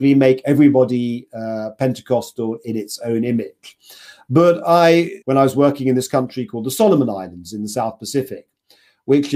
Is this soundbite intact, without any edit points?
no; 1 cut; at 5.2 s

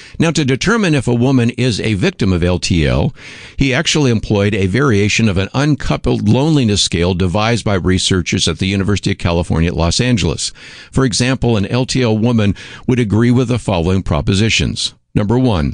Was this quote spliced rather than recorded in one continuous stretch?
no; 0 cuts

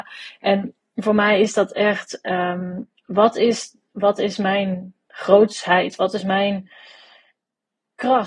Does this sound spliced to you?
no; 0 cuts

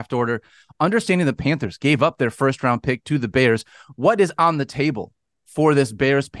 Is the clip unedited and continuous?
yes; 0 cuts

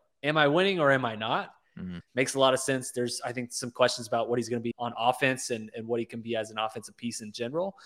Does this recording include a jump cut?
yes; 2 cuts; at 2.0 s, 4.7 s

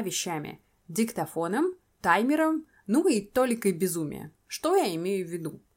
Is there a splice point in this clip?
no; 0 cuts

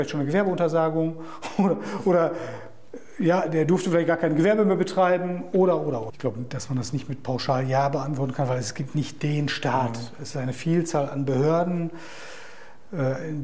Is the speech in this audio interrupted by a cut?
yes; 1 cut; at 6.1 s

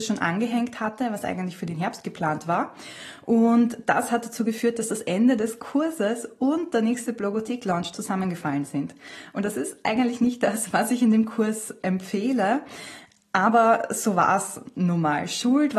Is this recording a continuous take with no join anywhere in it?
yes; 0 cuts

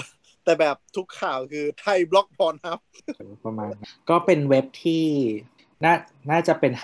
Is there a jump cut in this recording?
yes; 1 cut; at 3.2 s

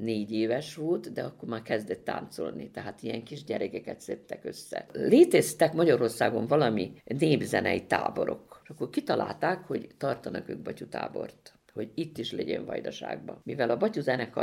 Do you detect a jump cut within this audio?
yes; 2 cuts; at 4.9 s, 8.6 s

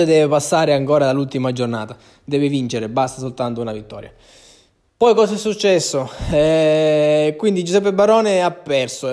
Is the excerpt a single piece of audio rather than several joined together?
yes; 0 cuts

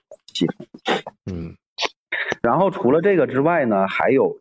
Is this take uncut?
yes; 0 cuts

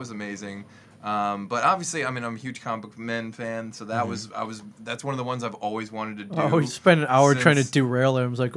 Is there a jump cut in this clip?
no; 0 cuts

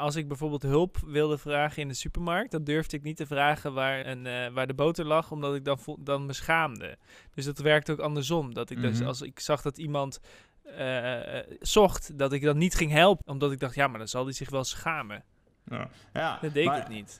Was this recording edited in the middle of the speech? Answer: yes; 2 cuts; at 4.0 s, 13.2 s

